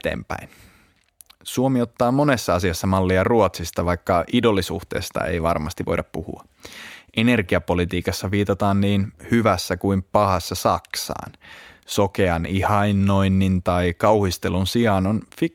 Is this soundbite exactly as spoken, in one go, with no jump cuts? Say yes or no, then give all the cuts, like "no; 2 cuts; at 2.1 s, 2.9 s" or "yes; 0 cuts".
yes; 0 cuts